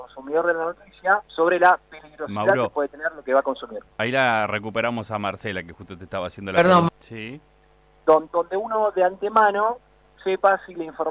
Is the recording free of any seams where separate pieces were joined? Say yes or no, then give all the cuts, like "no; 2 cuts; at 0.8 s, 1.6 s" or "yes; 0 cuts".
no; 3 cuts; at 1.3 s, 6.9 s, 8.3 s